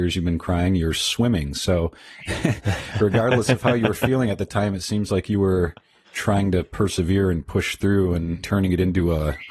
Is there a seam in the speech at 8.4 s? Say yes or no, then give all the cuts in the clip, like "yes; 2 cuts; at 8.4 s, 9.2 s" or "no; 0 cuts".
yes; 2 cuts; at 6.0 s, 8.4 s